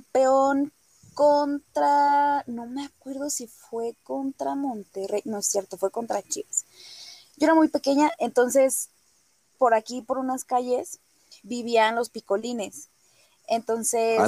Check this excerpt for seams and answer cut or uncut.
uncut